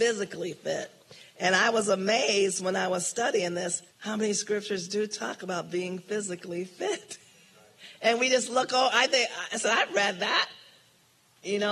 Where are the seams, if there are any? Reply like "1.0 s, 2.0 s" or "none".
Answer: 3.9 s